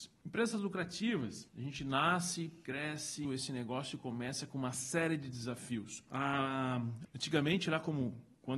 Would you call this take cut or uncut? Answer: cut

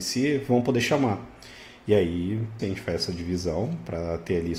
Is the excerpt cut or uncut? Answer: cut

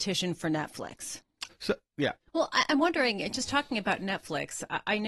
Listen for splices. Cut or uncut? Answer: cut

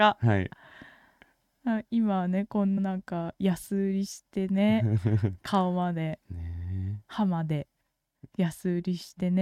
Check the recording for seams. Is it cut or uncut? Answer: cut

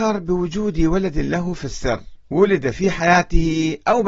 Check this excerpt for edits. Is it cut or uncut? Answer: cut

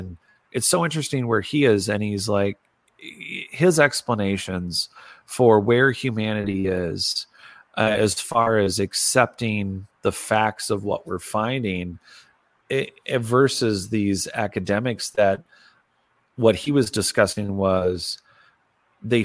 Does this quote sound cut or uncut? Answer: uncut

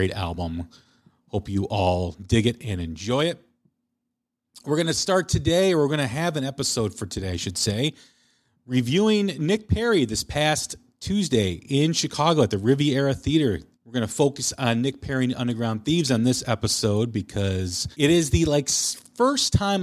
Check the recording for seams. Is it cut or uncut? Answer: cut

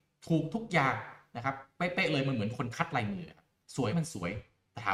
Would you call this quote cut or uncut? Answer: cut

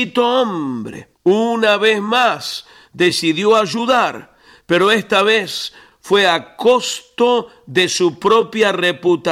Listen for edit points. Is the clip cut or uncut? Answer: cut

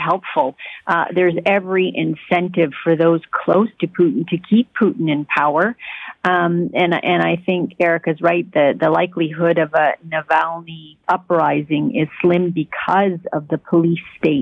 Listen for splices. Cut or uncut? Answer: cut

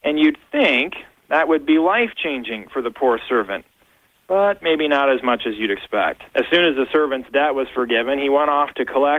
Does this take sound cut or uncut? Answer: cut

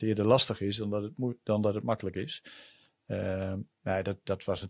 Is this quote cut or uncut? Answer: uncut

